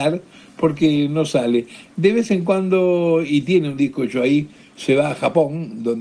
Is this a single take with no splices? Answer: yes; 0 cuts

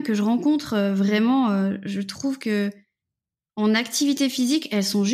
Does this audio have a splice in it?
no; 0 cuts

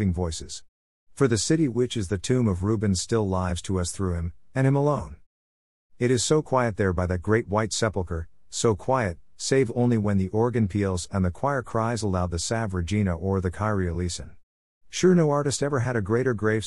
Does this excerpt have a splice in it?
no; 0 cuts

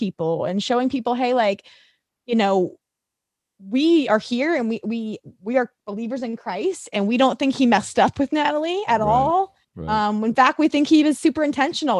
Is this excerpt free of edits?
yes; 0 cuts

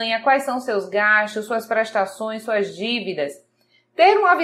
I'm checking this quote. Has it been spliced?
no; 0 cuts

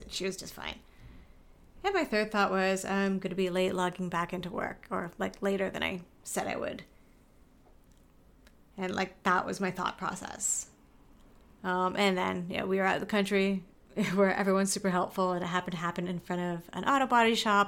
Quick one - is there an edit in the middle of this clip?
no; 0 cuts

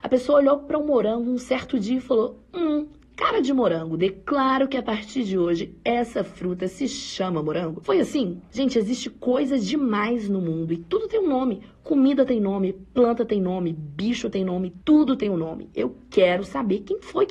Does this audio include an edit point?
no; 0 cuts

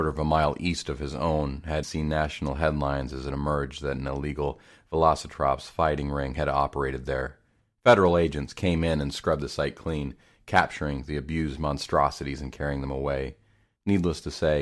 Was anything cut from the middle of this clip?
yes; 1 cut; at 1.8 s

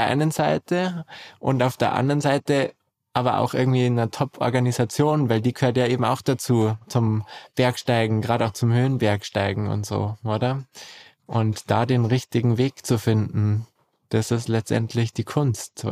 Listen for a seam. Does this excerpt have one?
no; 0 cuts

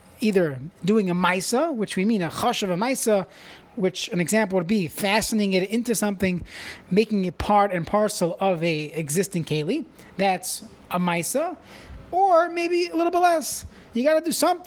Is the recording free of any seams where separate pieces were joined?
yes; 0 cuts

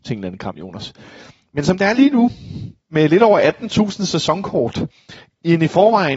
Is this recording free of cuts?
yes; 0 cuts

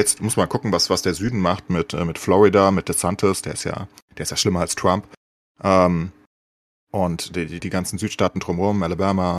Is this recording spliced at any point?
yes; 1 cut; at 7.6 s

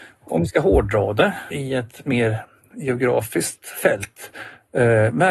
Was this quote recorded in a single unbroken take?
no; 1 cut; at 1.5 s

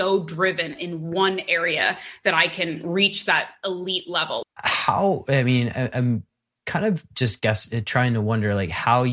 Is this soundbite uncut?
no; 1 cut; at 4.4 s

